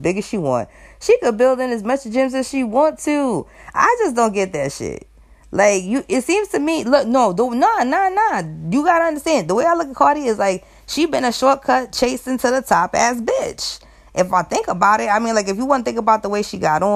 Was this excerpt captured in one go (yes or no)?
yes